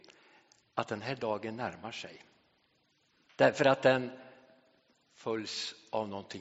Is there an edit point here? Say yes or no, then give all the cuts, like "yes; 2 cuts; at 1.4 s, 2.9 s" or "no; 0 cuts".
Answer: yes; 1 cut; at 3.3 s